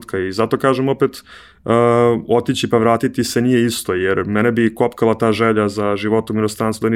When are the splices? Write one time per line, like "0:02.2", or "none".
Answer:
none